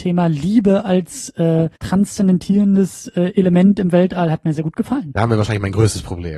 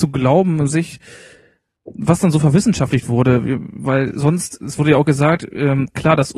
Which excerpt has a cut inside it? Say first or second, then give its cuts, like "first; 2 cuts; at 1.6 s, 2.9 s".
first; 2 cuts; at 1.8 s, 4.5 s